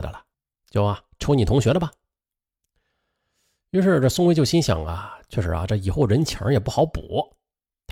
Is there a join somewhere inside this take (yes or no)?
no